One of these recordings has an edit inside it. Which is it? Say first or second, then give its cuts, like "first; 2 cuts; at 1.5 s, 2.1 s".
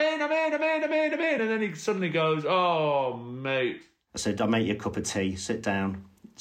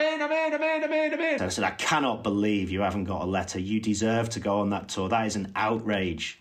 second; 1 cut; at 1.4 s